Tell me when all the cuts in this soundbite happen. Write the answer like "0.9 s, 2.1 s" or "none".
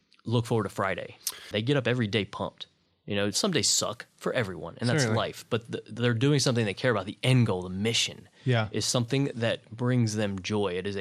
1.5 s